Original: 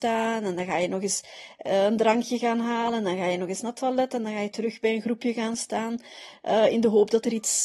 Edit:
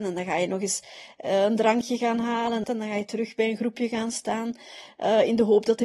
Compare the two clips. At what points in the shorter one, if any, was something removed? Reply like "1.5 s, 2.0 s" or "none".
2.6 s